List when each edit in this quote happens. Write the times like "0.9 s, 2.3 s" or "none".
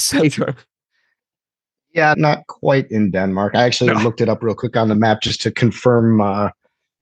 2.1 s

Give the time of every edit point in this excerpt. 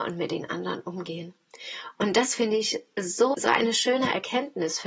3.3 s

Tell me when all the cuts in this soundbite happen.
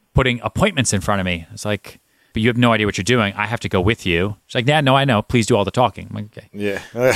2.3 s

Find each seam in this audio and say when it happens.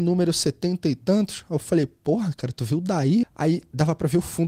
3.2 s

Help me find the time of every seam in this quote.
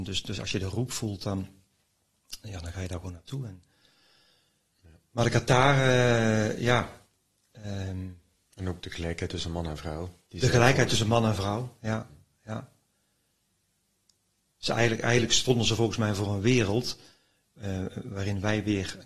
none

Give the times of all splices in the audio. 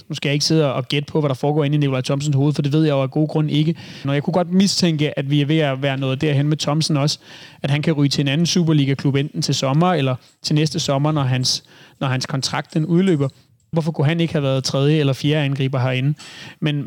4.0 s, 13.7 s

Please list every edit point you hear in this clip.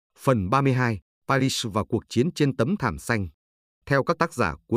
none

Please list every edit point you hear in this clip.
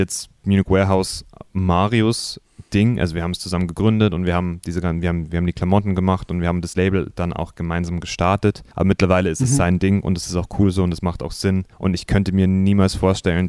8.7 s, 11.7 s

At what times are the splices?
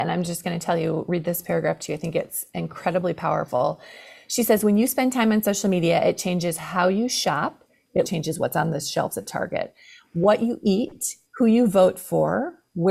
8.0 s, 11.3 s

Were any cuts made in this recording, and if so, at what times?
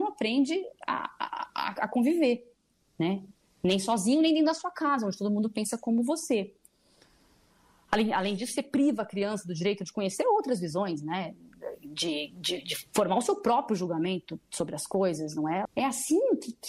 15.7 s

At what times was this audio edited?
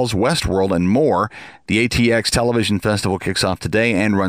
none

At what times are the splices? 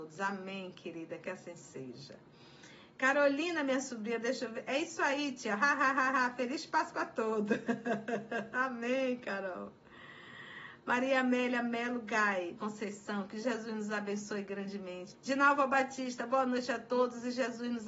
12.6 s, 15.1 s

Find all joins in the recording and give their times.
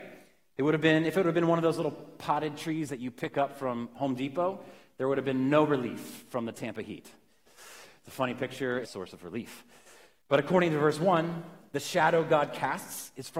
7.5 s, 8.8 s

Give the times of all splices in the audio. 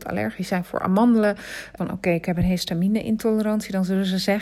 1.8 s

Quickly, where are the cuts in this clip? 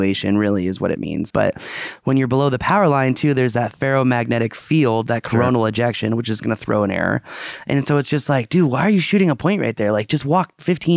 1.3 s

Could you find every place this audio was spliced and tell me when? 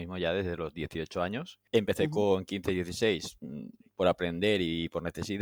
1.7 s

